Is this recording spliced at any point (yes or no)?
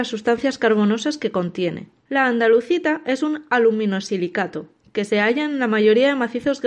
no